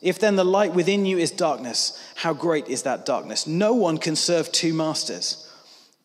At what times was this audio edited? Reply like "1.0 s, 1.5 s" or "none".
none